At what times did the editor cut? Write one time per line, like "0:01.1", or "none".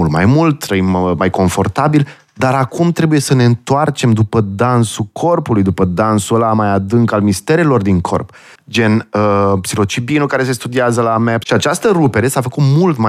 0:08.5
0:11.4